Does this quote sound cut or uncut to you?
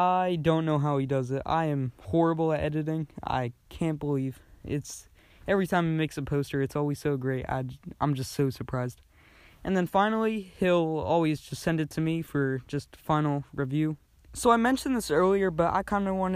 cut